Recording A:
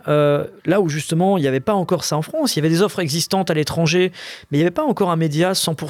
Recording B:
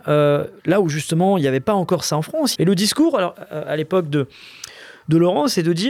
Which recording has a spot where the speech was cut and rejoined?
B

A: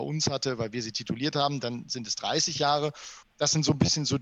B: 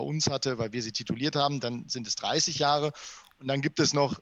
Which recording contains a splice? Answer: A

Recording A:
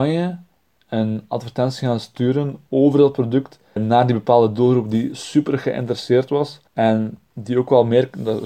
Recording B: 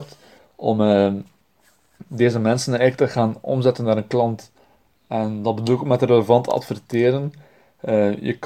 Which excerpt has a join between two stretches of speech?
A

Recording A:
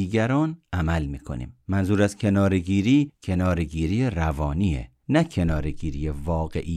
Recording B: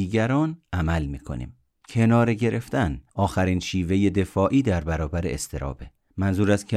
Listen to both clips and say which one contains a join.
A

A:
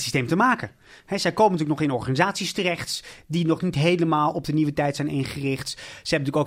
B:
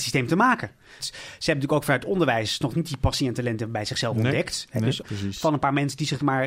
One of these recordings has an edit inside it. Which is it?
B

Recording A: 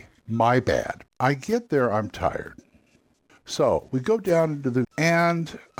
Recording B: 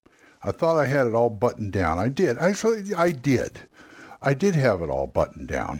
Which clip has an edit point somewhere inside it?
A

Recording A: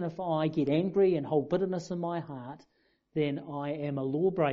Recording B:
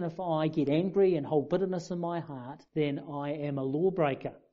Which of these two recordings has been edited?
B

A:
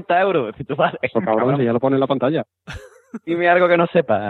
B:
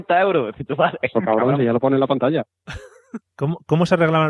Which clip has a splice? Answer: B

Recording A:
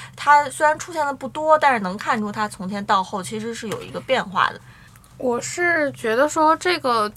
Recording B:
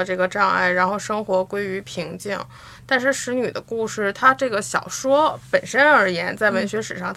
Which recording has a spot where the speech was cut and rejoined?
A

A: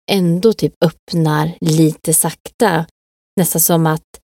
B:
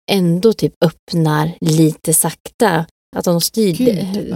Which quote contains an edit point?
B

